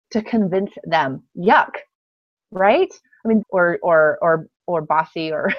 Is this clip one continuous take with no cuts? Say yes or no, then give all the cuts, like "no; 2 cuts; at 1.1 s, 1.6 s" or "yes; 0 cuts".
no; 1 cut; at 3.4 s